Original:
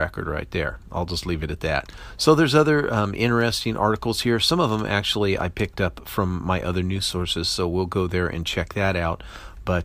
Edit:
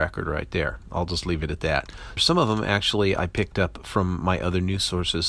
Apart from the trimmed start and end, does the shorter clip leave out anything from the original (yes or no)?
yes